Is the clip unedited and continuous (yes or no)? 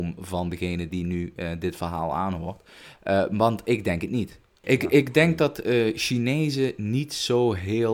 yes